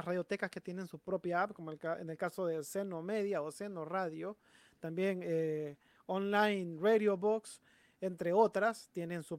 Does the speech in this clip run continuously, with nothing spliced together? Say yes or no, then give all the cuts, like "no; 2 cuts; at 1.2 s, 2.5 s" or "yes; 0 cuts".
yes; 0 cuts